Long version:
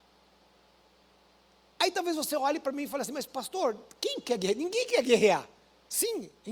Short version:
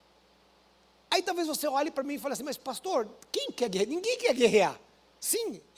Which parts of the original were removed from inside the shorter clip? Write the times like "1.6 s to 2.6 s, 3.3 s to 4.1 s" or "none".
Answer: none